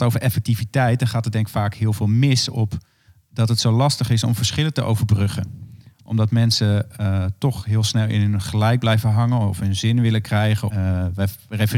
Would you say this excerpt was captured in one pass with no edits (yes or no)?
no